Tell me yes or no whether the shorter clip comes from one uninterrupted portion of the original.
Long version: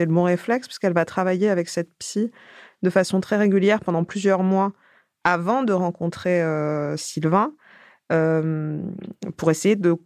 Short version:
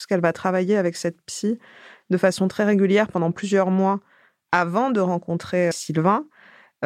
no